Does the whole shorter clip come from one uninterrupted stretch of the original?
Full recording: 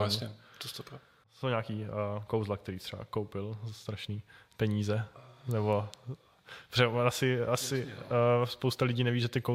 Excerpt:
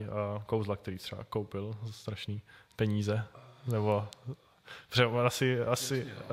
yes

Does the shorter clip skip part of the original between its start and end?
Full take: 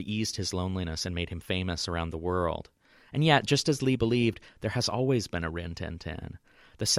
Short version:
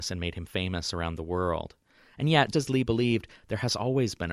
yes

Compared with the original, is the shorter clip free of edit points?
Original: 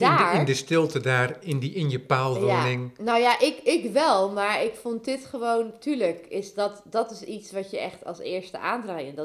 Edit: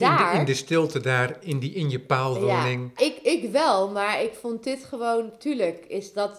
no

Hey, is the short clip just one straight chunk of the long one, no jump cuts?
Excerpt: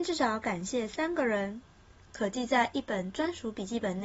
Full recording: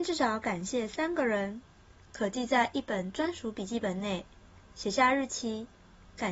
yes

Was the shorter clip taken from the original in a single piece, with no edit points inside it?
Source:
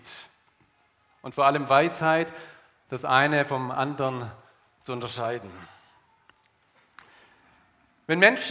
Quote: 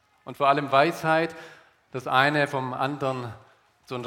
yes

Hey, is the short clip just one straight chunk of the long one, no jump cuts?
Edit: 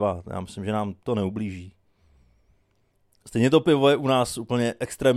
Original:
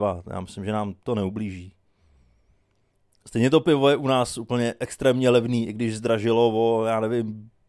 yes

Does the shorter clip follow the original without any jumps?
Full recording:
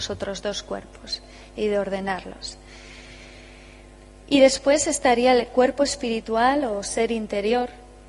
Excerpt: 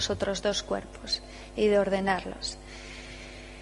yes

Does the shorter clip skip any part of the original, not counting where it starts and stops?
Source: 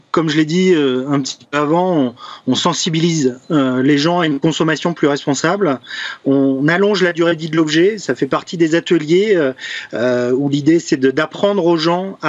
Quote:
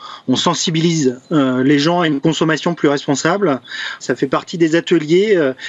yes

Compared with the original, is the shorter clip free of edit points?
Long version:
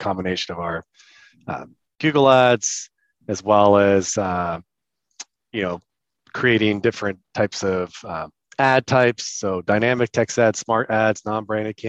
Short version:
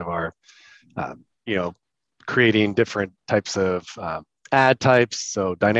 no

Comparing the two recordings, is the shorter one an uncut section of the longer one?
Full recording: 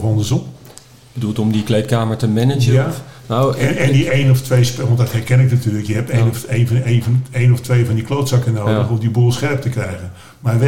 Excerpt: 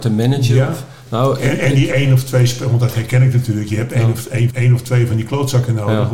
no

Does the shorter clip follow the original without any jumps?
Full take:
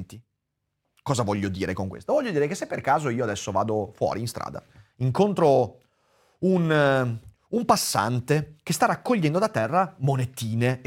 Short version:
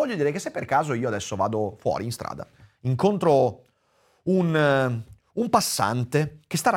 yes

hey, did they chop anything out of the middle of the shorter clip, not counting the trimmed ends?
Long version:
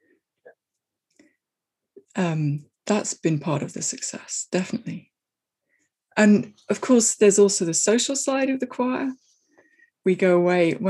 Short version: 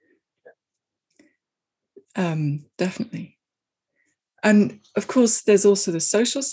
yes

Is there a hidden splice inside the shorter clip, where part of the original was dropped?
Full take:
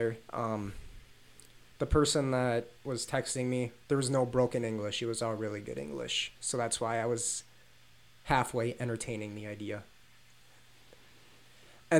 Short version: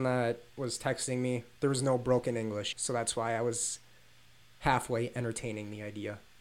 yes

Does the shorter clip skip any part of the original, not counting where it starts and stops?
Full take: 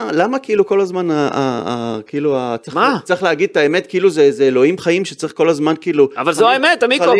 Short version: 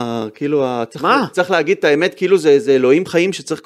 no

